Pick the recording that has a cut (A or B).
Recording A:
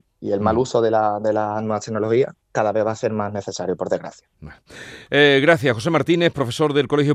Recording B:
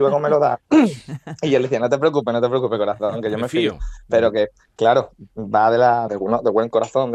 B